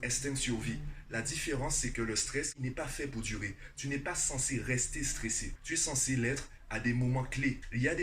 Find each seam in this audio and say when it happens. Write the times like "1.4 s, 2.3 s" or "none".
none

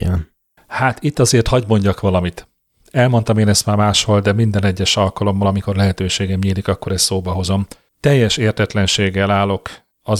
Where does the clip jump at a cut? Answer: none

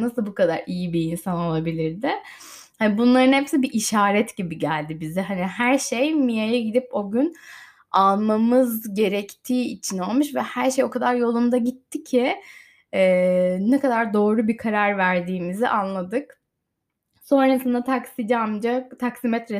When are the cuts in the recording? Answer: none

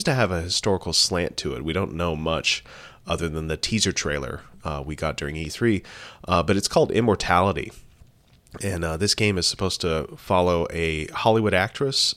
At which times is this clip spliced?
none

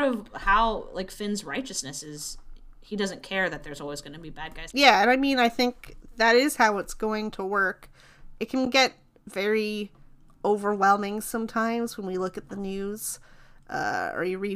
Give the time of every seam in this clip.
4.7 s

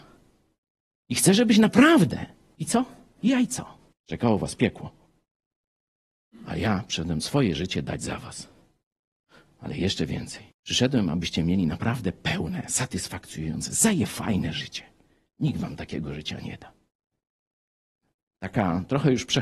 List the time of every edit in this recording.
2.6 s, 3.9 s, 10.5 s

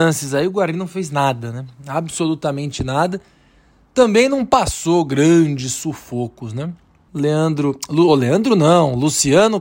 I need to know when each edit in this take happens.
7.1 s

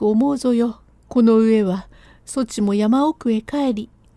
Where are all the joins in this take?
1.0 s

